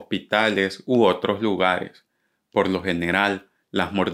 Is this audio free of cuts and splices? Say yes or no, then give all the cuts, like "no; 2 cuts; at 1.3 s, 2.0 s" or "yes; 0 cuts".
yes; 0 cuts